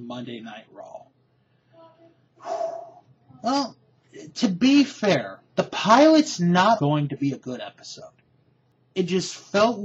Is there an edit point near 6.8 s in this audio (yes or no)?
yes